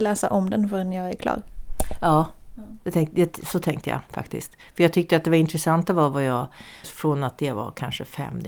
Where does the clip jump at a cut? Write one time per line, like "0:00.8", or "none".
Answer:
0:06.8